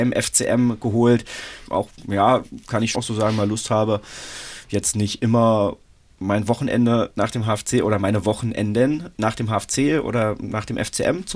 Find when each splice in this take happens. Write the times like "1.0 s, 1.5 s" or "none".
1.7 s, 2.9 s